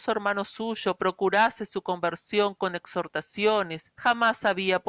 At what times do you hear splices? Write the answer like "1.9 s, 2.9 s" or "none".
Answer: 3.9 s